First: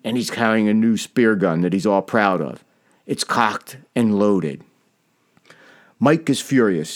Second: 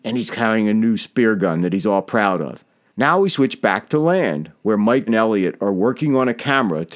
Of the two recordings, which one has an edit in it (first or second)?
second